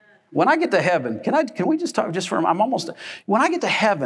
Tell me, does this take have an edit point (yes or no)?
no